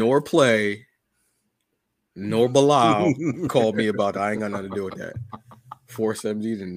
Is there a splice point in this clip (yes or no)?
no